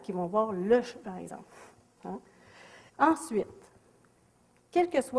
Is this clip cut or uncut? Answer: cut